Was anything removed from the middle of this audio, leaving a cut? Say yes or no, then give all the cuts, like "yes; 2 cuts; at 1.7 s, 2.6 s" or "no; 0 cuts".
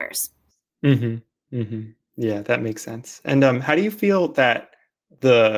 no; 0 cuts